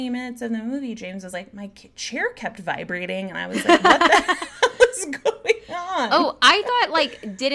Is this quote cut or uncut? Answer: uncut